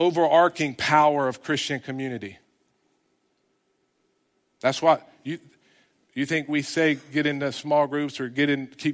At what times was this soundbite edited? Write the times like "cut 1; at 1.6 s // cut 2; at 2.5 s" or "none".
none